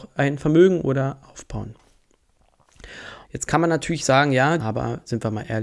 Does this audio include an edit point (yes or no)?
yes